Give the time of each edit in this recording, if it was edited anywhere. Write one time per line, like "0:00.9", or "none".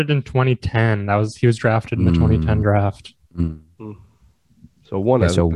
none